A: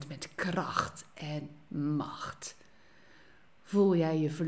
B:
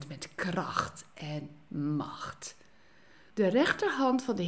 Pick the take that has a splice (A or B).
B